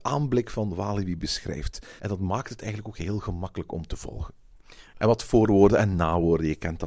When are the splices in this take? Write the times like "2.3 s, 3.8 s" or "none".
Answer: 2.0 s, 4.9 s